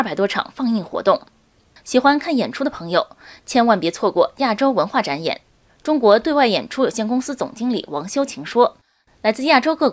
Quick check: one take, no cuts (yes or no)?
yes